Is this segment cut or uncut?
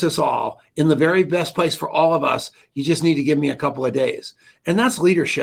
uncut